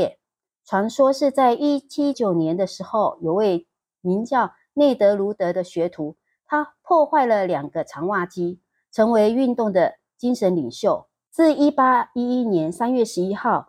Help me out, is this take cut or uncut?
cut